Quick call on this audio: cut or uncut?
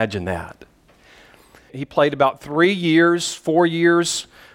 cut